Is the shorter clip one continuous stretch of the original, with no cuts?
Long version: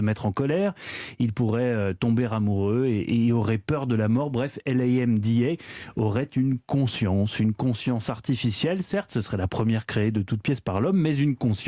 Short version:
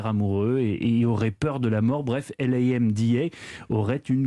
yes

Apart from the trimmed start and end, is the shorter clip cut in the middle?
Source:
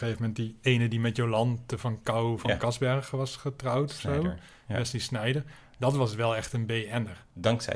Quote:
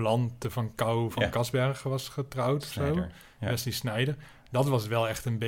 no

